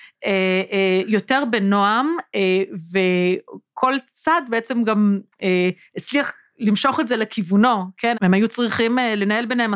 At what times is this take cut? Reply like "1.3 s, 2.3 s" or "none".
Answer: 8.1 s